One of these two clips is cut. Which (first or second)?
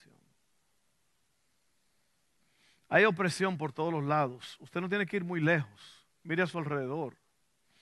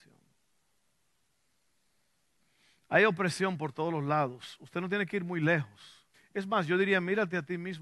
second